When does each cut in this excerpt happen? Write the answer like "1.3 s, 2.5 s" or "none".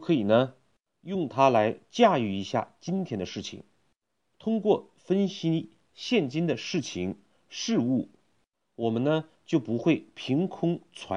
none